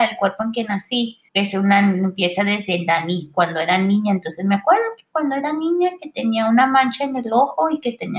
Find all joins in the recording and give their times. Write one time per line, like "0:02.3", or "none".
0:01.3